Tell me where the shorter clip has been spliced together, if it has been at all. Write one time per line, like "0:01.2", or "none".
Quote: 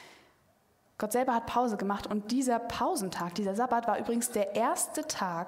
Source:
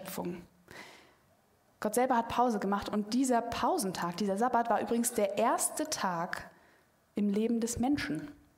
none